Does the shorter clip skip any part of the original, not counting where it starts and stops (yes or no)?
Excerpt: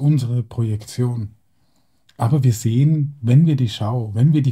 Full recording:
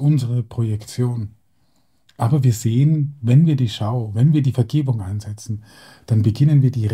no